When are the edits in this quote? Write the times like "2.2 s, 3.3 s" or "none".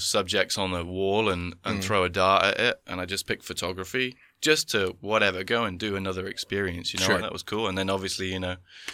7.2 s